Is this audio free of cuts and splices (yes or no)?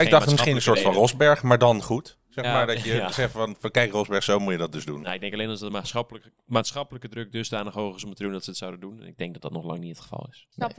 yes